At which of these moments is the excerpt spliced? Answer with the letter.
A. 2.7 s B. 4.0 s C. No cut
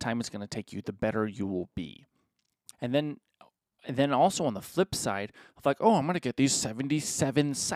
A